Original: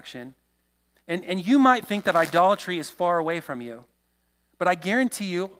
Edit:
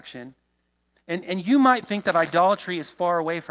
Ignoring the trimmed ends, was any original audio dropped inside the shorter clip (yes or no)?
no